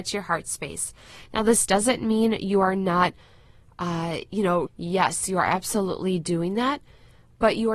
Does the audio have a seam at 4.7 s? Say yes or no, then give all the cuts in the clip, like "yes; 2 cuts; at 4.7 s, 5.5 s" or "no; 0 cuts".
yes; 1 cut; at 4.7 s